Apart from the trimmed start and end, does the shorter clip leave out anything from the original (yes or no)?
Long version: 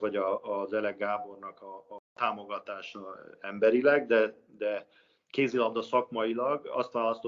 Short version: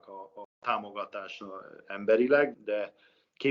yes